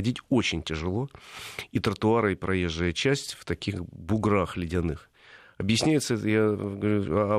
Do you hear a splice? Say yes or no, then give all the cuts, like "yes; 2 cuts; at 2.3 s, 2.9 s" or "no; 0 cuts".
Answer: no; 0 cuts